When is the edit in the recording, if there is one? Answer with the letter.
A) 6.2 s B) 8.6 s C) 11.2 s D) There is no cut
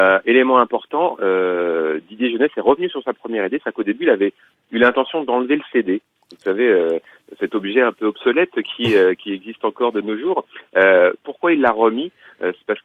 D